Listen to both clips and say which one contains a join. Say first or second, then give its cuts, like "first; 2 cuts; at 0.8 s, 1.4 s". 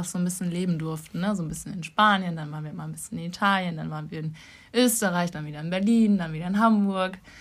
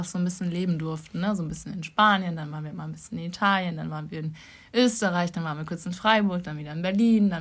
first; 1 cut; at 5.3 s